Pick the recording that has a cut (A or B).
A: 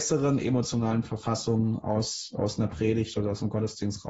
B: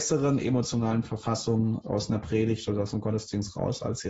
B